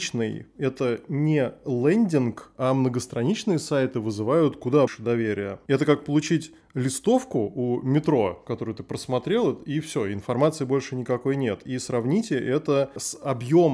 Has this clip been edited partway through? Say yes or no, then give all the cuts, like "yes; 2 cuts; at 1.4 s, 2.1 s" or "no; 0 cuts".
yes; 1 cut; at 4.9 s